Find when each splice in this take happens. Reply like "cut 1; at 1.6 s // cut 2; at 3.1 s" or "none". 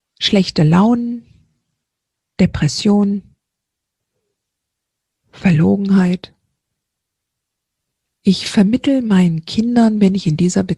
none